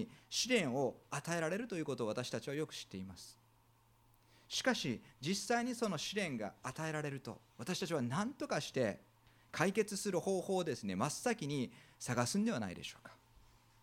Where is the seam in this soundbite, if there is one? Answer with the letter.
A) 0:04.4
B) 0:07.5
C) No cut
B